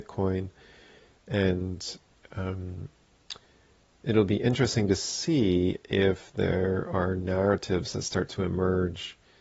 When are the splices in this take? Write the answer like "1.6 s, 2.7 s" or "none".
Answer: none